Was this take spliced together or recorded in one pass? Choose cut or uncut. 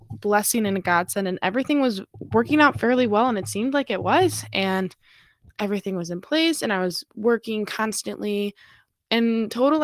uncut